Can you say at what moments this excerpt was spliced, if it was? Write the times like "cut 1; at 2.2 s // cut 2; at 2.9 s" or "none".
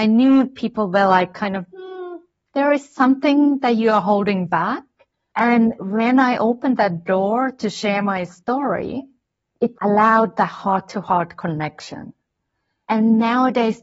none

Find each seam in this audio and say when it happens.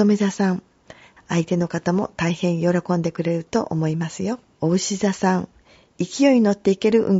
cut 1; at 1.2 s // cut 2; at 4.6 s

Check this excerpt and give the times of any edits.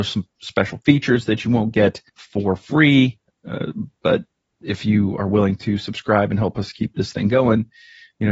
cut 1; at 2.1 s

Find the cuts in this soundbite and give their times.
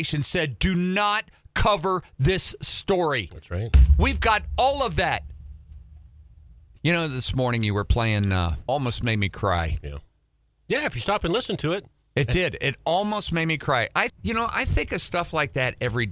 cut 1; at 6.8 s // cut 2; at 8.7 s // cut 3; at 14.1 s

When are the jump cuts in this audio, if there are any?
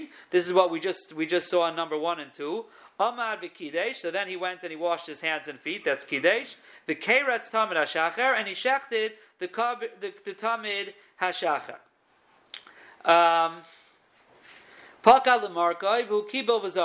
none

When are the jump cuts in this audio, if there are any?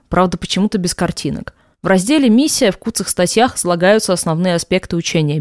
cut 1; at 1.7 s

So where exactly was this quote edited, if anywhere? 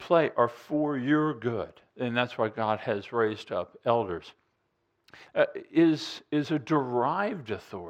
cut 1; at 5.3 s

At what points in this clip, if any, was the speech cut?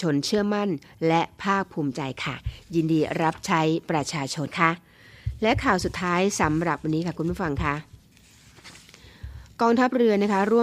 cut 1; at 4.5 s

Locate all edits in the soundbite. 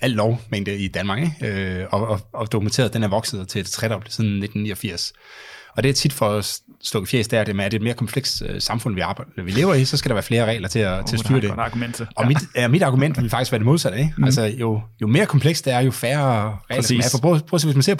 cut 1; at 7.7 s

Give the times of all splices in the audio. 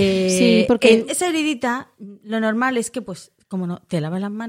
cut 1; at 1.1 s

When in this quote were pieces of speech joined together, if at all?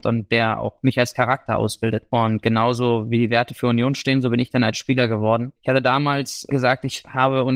cut 1; at 5.6 s

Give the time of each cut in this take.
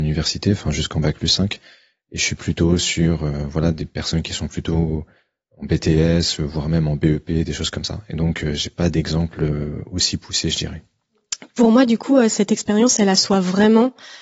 none

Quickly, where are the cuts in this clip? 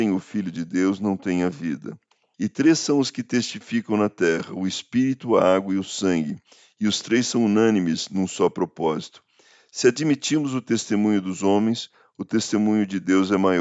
cut 1; at 2.3 s

